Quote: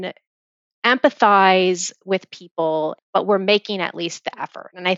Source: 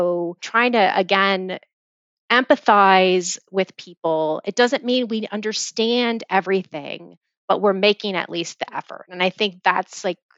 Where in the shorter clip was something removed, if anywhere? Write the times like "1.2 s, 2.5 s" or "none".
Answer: 3.0 s